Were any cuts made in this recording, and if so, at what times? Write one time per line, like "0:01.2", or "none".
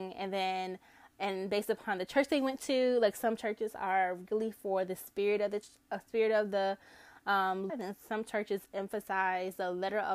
0:07.7